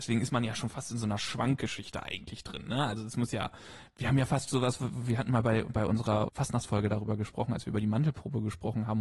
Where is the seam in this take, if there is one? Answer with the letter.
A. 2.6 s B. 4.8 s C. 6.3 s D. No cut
C